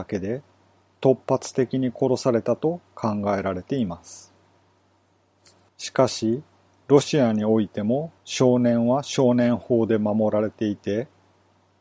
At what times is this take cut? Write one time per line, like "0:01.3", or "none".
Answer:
0:05.7
0:08.2